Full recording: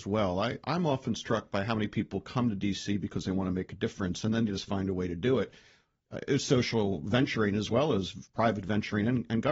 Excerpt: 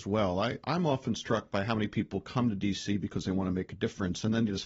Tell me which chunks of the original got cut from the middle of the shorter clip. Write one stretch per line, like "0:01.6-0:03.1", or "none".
none